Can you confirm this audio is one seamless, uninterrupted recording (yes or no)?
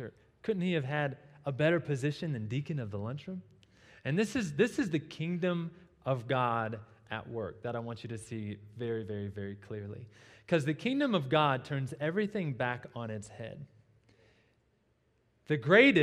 yes